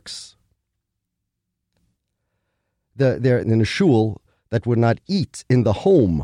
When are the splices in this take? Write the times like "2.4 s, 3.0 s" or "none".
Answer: 3.4 s

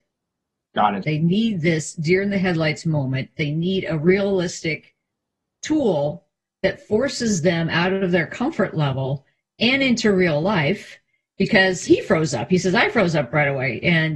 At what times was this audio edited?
1.0 s, 11.9 s

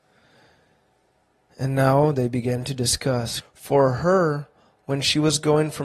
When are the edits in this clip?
3.4 s, 4.8 s

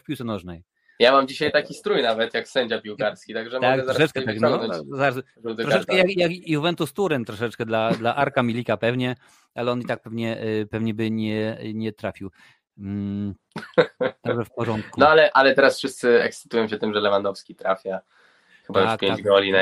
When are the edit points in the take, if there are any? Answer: none

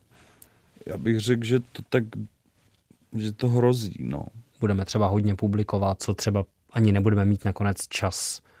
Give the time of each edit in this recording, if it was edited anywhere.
4.5 s, 6.0 s

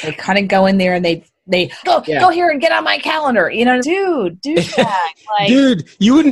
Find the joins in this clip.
1.8 s, 3.8 s

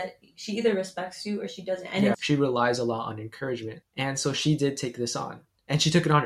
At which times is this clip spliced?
2.1 s, 3.8 s

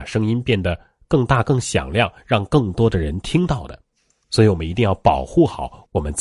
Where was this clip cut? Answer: 4.2 s

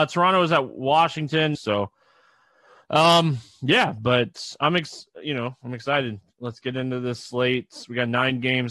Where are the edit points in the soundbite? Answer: 1.5 s

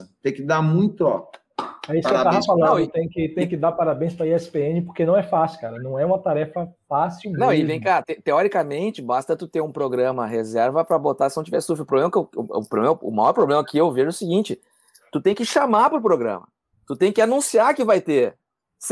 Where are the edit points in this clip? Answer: 8.0 s

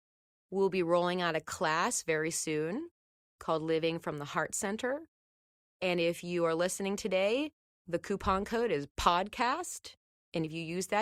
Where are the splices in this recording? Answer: 5.8 s

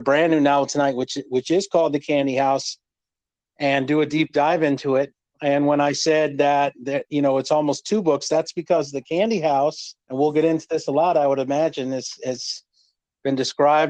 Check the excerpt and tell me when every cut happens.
10.0 s

